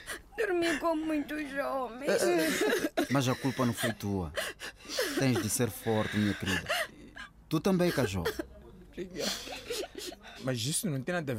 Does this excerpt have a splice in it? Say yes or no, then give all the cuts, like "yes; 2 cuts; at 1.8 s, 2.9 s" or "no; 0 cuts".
yes; 2 cuts; at 3.1 s, 10.4 s